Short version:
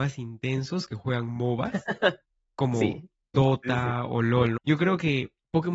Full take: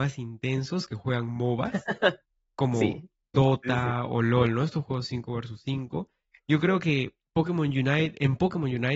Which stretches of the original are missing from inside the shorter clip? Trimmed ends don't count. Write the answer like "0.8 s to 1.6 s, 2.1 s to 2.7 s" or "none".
4.6 s to 6.4 s